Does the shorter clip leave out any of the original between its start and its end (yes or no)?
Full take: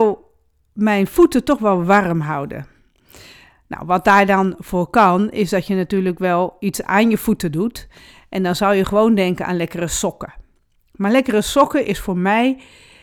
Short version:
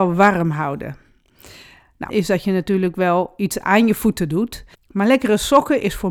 yes